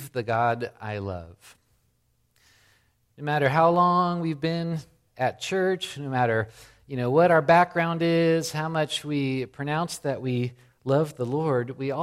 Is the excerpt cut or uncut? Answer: cut